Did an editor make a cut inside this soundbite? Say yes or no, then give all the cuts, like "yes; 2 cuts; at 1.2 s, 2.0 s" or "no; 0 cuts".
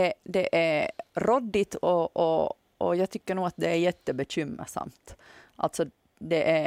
no; 0 cuts